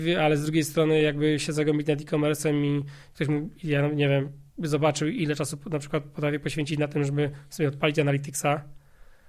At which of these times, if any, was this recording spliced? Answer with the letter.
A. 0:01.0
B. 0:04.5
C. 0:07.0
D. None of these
B